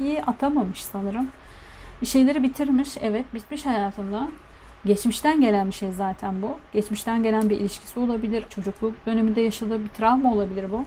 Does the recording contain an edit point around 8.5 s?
yes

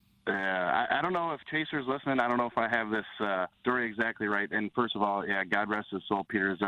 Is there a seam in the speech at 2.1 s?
no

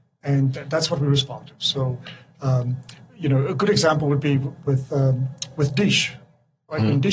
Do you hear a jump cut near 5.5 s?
no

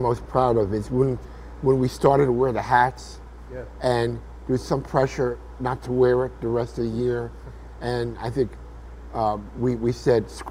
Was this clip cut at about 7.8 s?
no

